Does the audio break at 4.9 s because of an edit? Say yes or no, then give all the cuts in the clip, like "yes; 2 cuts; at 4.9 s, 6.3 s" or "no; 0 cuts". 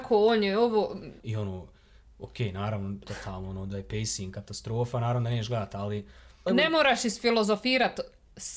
no; 3 cuts; at 1.2 s, 3.0 s, 6.5 s